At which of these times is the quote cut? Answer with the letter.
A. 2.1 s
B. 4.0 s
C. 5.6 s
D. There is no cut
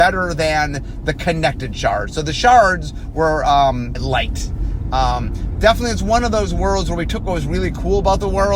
B